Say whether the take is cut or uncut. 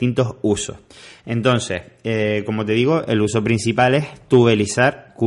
uncut